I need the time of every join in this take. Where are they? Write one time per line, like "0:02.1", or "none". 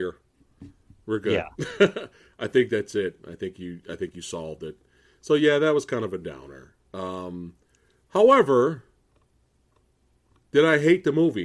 none